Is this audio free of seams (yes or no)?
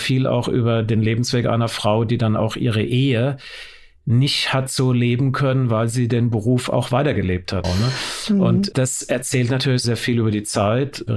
no